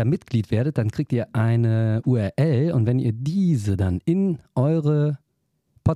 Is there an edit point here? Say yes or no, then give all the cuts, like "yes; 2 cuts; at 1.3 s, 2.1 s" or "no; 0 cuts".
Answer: no; 0 cuts